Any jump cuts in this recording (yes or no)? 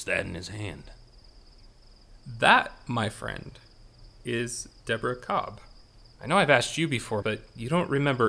yes